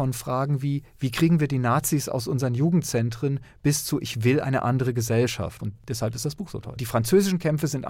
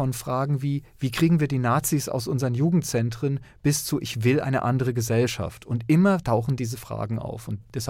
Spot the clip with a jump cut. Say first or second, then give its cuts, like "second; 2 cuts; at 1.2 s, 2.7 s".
first; 2 cuts; at 5.6 s, 6.8 s